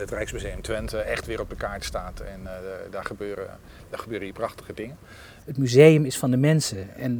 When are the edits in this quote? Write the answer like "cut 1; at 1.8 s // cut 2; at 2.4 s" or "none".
cut 1; at 5.4 s